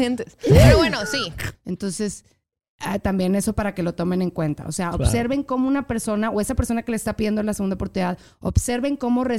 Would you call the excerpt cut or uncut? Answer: cut